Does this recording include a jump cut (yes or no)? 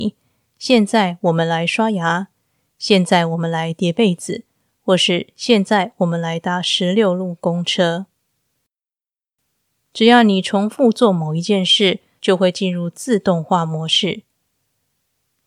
yes